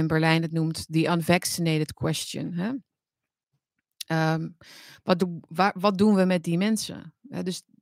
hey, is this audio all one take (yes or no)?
no